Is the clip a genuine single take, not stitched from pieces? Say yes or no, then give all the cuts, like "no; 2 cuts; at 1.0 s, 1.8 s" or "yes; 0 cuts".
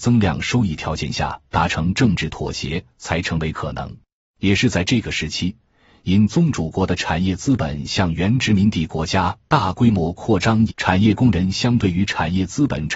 no; 2 cuts; at 4.2 s, 10.7 s